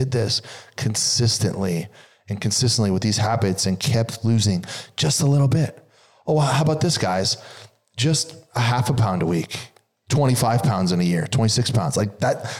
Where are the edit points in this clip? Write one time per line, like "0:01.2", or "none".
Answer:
none